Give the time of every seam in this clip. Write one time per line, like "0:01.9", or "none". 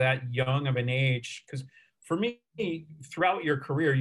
none